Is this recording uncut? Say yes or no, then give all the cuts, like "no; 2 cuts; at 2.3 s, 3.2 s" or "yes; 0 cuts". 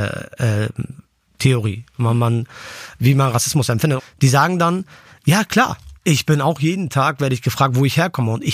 no; 2 cuts; at 4.0 s, 6.0 s